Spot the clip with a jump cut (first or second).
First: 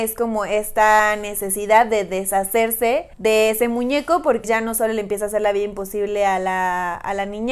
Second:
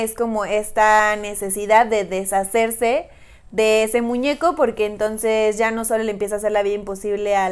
first